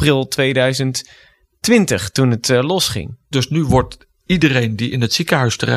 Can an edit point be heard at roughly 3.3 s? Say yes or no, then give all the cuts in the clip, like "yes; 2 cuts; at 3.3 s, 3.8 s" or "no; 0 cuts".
yes; 1 cut; at 3.3 s